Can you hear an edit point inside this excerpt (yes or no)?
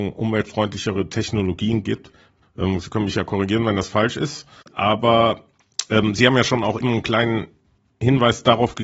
yes